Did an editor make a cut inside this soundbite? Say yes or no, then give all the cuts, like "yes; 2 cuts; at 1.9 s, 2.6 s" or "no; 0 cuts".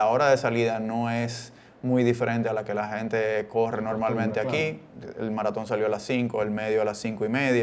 no; 0 cuts